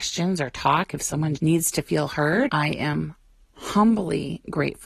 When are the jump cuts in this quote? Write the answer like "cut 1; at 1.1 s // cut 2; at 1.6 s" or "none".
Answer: cut 1; at 1.4 s // cut 2; at 2.5 s